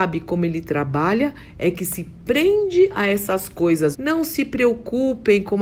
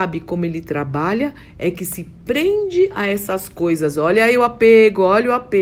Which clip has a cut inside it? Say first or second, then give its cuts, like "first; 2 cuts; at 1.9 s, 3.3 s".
first; 1 cut; at 3.9 s